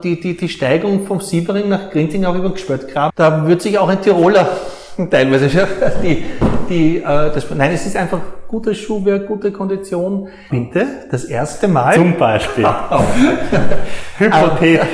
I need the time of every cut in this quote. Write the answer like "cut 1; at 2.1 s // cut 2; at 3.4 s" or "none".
cut 1; at 3.1 s // cut 2; at 10.5 s

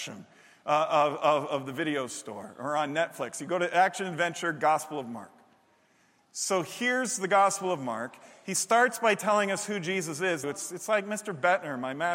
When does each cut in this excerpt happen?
cut 1; at 10.4 s

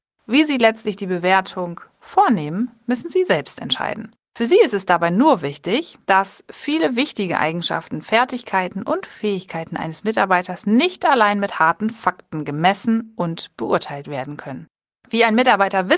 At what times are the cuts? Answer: none

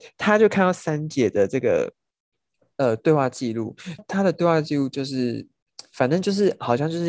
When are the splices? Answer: cut 1; at 4.0 s

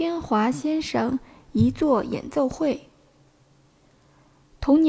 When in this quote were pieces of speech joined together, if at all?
none

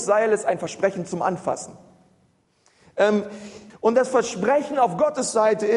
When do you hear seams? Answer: cut 1; at 3.7 s

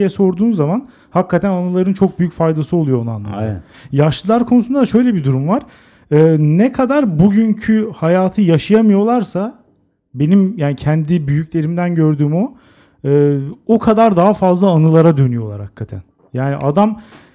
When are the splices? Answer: none

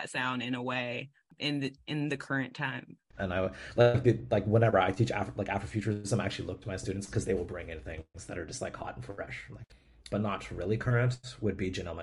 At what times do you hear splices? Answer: cut 1; at 3.2 s // cut 2; at 10.1 s

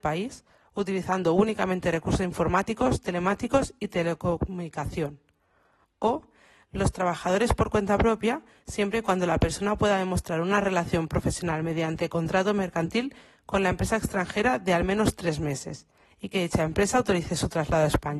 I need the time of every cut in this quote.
none

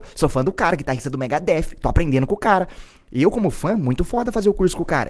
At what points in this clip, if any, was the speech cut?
none

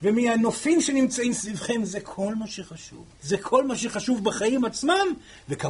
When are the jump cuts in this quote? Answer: cut 1; at 3.1 s

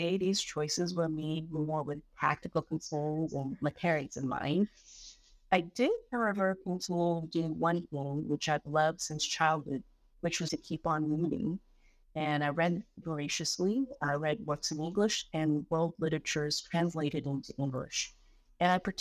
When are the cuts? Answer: cut 1; at 10.5 s // cut 2; at 13.0 s

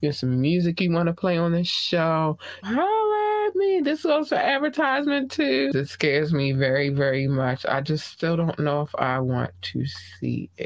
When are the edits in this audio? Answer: cut 1; at 2.6 s // cut 2; at 5.7 s

